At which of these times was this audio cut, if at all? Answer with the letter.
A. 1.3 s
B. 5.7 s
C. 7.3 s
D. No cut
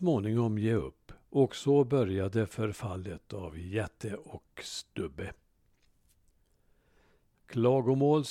C